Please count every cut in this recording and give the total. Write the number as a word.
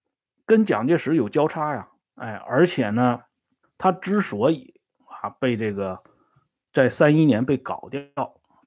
two